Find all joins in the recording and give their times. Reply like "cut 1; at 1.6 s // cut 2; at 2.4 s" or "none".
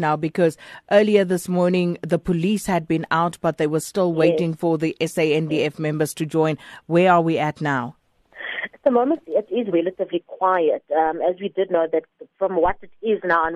none